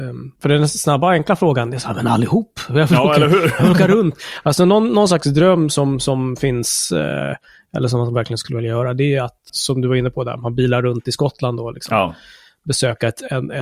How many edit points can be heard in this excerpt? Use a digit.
1